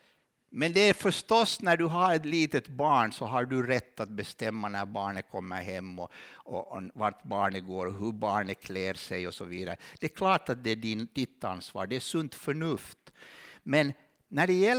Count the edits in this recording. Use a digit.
0